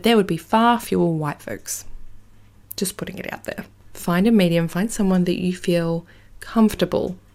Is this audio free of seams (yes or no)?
no